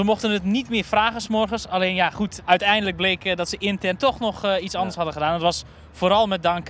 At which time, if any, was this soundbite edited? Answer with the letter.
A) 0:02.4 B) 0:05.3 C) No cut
A